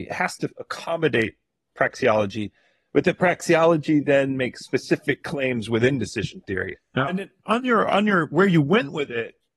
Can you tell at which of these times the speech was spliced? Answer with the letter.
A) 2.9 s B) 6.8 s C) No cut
B